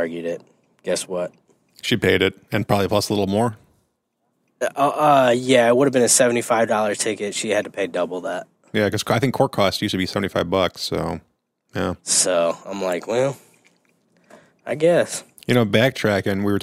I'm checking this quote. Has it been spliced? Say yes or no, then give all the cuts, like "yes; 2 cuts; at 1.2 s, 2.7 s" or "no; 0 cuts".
yes; 1 cut; at 12.0 s